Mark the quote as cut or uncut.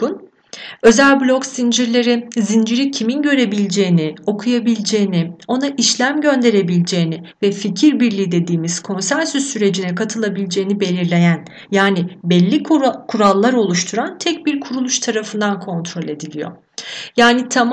uncut